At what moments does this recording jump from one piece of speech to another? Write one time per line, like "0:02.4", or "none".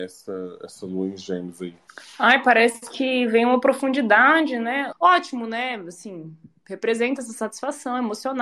0:04.9

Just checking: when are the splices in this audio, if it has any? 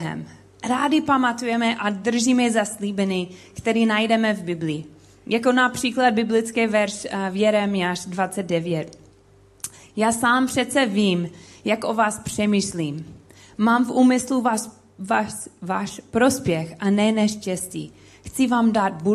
none

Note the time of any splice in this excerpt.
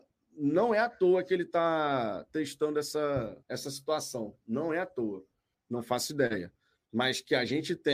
0:03.4
0:05.5

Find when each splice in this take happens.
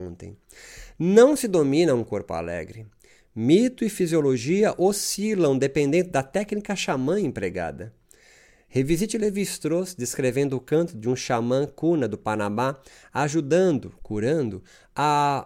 none

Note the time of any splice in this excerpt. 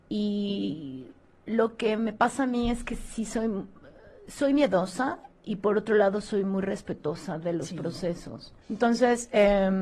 0:08.6

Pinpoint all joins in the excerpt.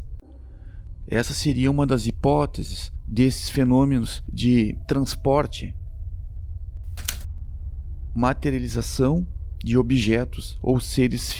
none

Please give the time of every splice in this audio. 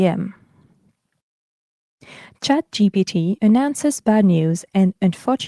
0:03.4

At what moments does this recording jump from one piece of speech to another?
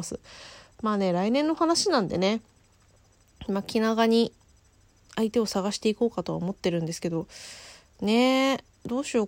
none

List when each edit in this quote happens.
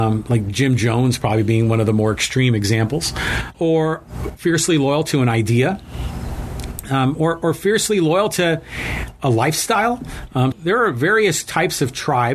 0:03.5
0:10.5

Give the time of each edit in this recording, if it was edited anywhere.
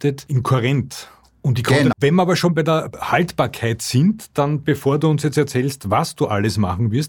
0:01.9

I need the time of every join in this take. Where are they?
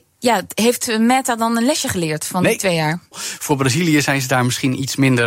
0:03.1

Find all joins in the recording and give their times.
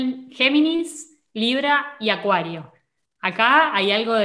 none

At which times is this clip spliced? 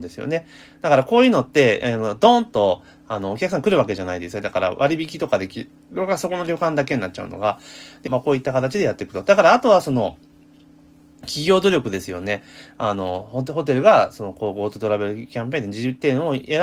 0:04.4
0:08.1

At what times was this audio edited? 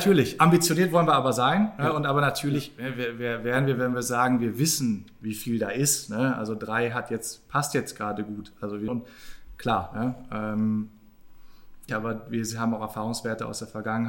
0:08.9
0:11.9

